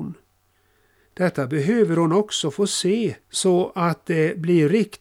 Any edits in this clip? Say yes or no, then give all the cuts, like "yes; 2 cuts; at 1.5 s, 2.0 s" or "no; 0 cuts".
yes; 2 cuts; at 1.0 s, 3.2 s